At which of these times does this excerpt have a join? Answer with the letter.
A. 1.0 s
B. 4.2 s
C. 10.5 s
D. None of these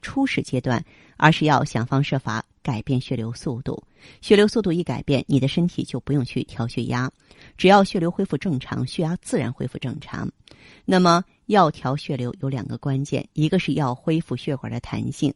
D